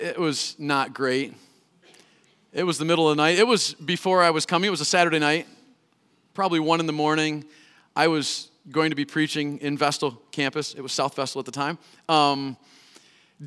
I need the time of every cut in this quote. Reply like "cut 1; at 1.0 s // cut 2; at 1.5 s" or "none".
none